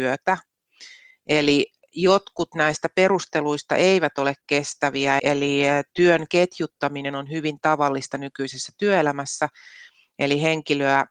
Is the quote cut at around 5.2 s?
yes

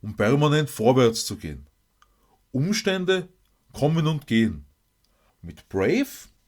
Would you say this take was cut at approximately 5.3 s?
yes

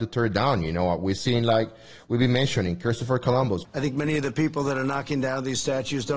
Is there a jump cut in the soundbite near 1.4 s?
no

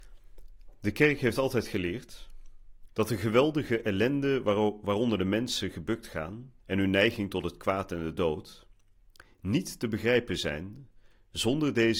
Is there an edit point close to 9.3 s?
no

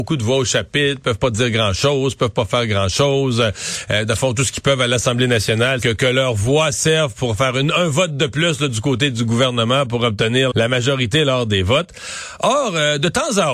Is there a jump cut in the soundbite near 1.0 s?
no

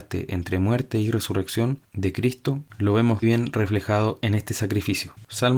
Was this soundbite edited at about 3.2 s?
yes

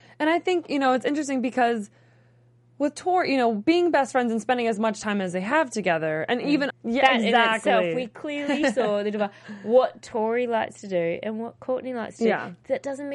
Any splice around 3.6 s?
no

